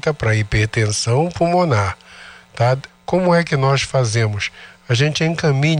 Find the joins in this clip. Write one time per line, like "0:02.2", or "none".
0:02.9